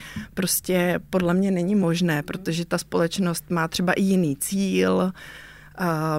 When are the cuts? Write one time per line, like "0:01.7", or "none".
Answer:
none